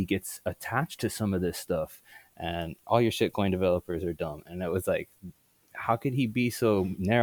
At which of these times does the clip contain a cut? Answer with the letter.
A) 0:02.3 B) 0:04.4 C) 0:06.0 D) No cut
A